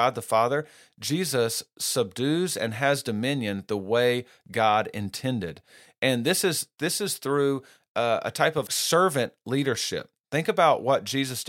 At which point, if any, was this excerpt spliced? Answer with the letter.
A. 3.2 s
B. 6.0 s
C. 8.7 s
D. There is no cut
C